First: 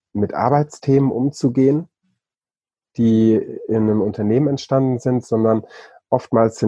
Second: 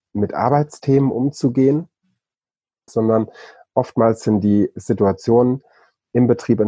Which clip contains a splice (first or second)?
second